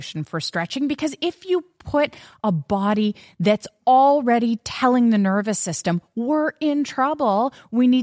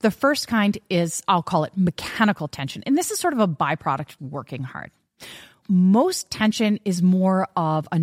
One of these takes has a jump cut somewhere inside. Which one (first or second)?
second